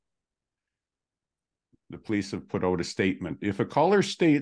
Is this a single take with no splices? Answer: yes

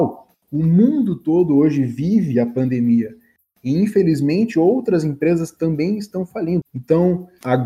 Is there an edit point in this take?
yes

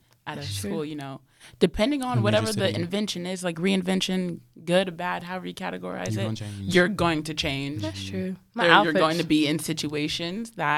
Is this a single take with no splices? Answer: yes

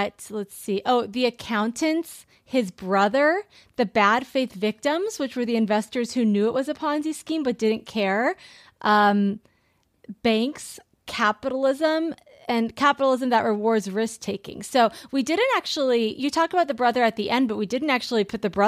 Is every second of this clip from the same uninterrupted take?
yes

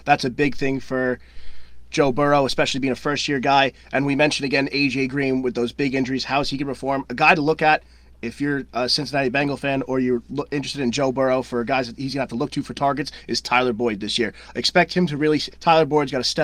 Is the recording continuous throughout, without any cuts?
no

